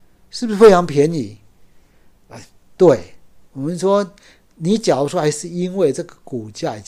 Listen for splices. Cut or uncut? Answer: uncut